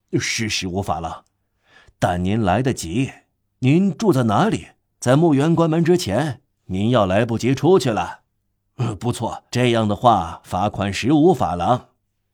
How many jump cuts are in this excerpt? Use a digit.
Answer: 2